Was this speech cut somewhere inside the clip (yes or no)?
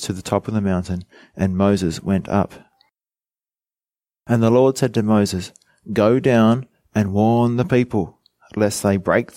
no